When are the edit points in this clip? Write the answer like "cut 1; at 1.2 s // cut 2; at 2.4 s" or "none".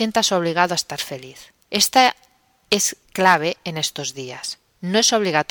cut 1; at 1.6 s // cut 2; at 3.1 s